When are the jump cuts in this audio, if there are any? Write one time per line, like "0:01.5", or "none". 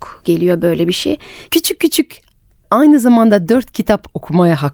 0:01.5